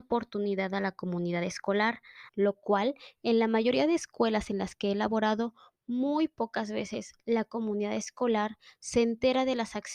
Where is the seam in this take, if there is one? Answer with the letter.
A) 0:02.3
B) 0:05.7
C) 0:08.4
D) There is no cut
A